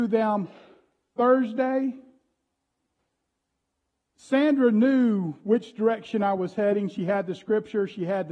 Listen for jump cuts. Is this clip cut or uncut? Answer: uncut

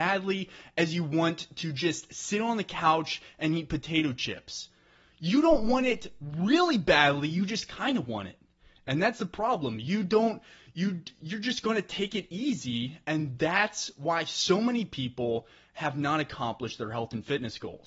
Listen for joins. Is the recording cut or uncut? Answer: uncut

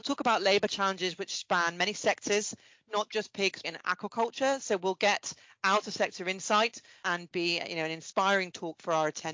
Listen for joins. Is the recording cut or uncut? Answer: cut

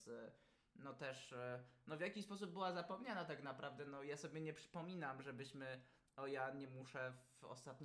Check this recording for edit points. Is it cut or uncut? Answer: uncut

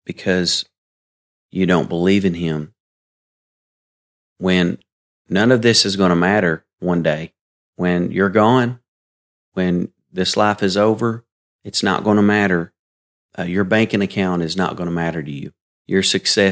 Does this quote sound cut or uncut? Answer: uncut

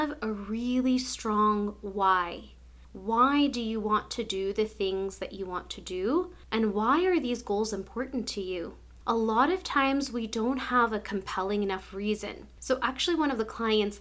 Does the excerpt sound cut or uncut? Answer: uncut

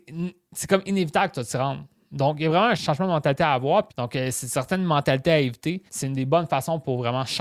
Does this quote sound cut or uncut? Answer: cut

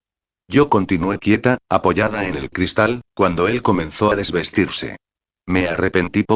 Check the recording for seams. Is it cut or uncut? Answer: uncut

